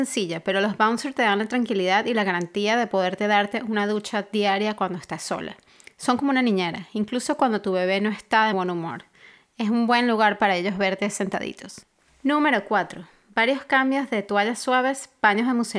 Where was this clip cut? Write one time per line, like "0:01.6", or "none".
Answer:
0:08.5